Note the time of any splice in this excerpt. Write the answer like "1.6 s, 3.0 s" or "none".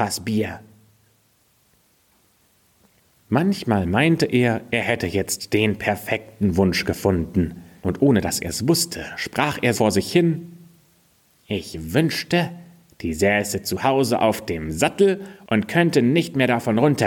7.8 s, 9.7 s